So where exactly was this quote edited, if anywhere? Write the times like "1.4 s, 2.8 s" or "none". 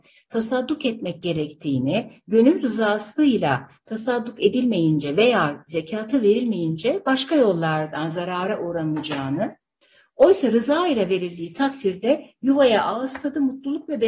none